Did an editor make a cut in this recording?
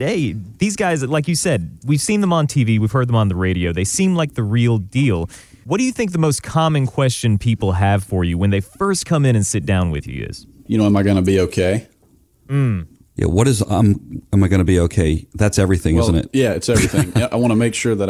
no; 0 cuts

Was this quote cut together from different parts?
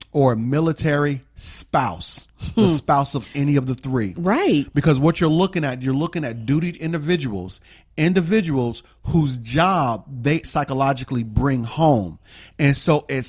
yes; 1 cut; at 10.4 s

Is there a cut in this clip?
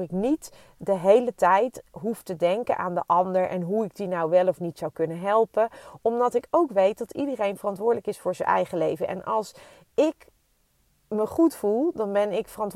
no; 0 cuts

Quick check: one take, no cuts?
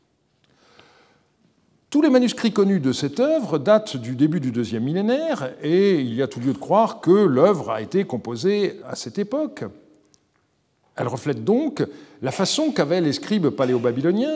no; 1 cut; at 8.8 s

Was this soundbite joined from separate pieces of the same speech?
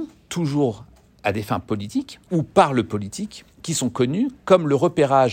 yes; 2 cuts; at 2.2 s, 3.5 s

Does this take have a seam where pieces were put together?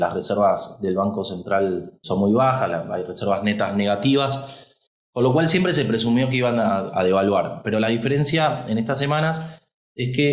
yes; 1 cut; at 6.9 s

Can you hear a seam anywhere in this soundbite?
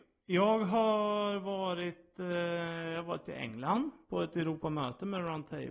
no; 0 cuts

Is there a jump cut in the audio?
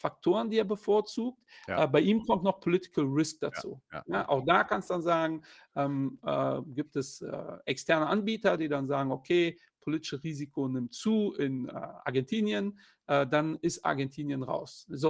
no; 0 cuts

